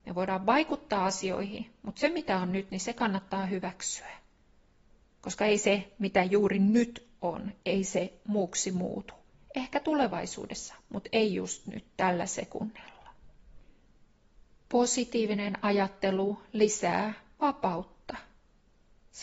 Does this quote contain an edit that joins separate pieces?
no; 0 cuts

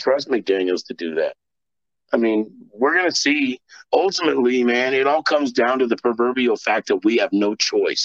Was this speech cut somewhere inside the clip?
no; 0 cuts

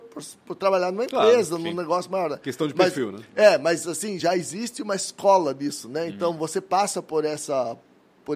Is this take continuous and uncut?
yes; 0 cuts

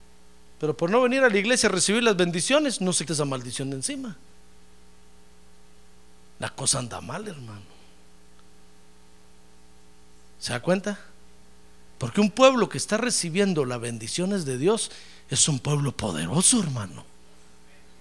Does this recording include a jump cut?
yes; 1 cut; at 3.1 s

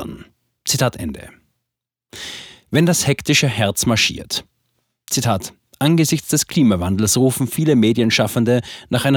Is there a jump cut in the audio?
no; 0 cuts

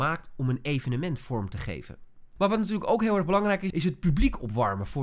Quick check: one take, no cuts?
no; 2 cuts; at 2.4 s, 3.7 s

